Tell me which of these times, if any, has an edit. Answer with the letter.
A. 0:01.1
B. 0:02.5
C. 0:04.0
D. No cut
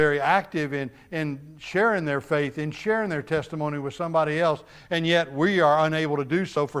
D